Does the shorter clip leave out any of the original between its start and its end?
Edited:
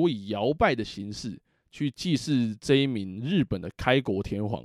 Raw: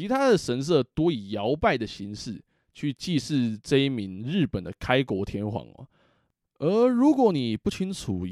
no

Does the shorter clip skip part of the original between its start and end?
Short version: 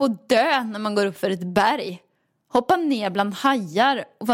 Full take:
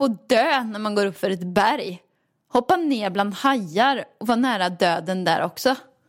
no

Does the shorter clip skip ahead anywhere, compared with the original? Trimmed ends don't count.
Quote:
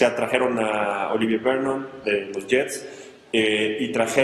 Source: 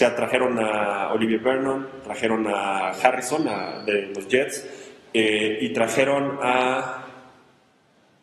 yes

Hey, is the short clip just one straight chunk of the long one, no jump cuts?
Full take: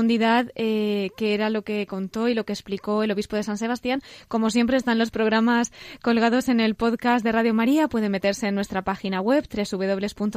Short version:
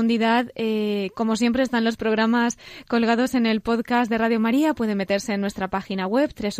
no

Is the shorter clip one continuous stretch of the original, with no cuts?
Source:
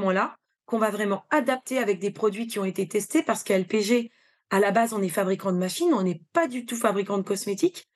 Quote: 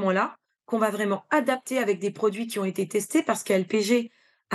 yes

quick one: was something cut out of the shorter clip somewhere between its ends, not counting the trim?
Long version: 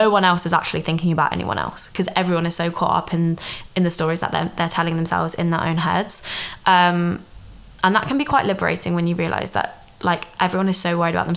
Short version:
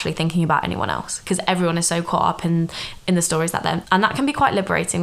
yes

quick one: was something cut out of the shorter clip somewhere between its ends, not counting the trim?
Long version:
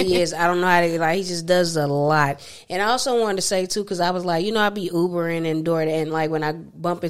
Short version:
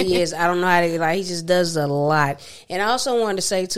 no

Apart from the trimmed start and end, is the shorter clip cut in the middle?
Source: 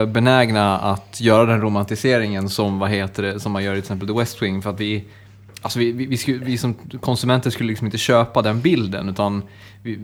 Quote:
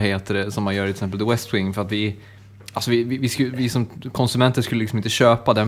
no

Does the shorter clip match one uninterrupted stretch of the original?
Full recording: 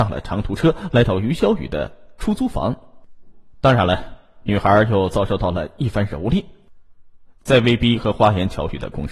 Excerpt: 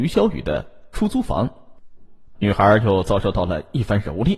no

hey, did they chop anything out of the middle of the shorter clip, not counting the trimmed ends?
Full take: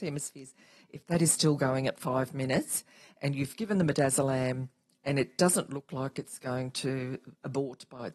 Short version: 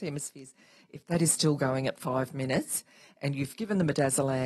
no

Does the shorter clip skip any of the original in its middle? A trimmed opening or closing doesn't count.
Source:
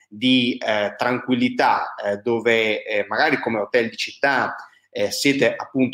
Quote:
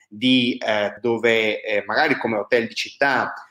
yes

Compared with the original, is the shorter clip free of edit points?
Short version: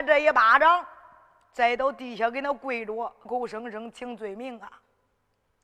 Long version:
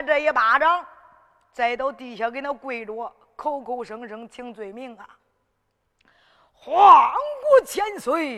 no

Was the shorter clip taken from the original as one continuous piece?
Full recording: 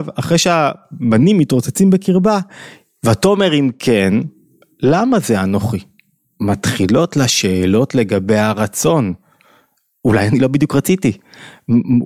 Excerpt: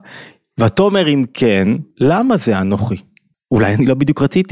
no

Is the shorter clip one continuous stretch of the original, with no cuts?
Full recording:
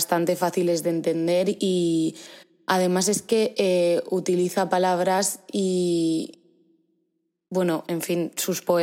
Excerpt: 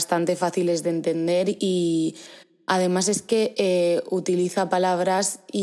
yes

